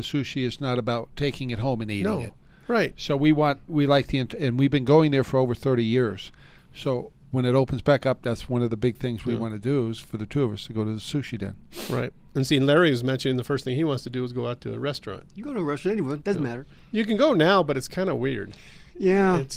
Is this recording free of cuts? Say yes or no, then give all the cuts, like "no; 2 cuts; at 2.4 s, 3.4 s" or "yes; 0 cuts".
no; 1 cut; at 3.7 s